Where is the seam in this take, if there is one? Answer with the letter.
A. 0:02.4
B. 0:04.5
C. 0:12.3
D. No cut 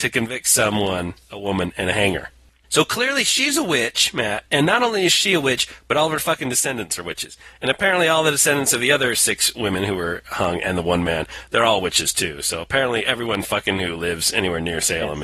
D